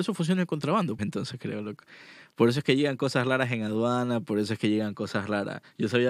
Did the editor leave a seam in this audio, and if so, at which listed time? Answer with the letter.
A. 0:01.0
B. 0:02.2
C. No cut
A